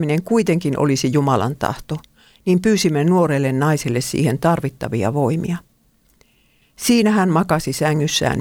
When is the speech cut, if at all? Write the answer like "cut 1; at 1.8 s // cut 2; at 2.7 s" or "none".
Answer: cut 1; at 6.6 s